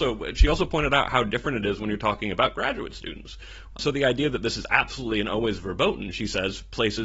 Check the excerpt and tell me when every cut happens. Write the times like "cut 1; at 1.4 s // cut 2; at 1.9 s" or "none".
cut 1; at 3.7 s